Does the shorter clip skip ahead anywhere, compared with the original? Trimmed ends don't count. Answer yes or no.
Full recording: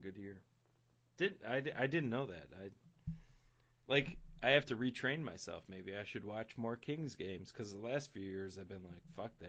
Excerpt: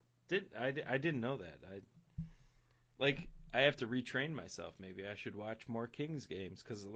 no